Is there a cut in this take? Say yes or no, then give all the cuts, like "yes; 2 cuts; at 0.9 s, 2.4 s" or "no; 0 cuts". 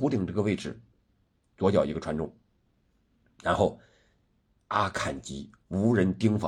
no; 0 cuts